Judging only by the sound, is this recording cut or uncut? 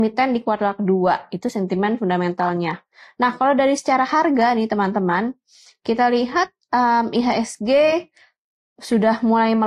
uncut